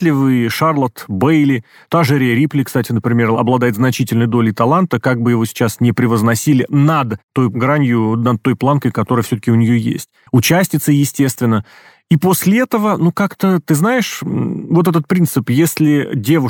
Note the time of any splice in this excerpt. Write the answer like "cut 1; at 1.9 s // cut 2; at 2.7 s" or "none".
cut 1; at 10.3 s